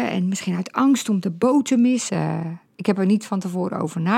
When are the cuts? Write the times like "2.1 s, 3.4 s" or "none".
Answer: 2.1 s